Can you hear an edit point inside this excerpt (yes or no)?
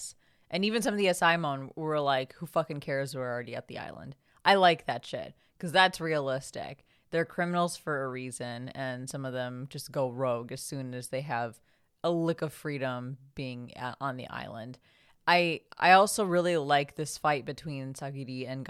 no